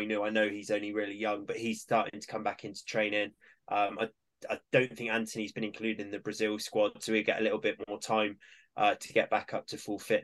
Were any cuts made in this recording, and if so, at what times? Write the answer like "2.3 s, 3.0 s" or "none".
none